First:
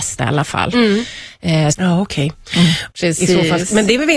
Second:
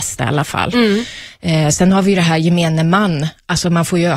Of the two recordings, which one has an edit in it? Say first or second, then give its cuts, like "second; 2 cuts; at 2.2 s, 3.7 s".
first; 2 cuts; at 1.7 s, 2.9 s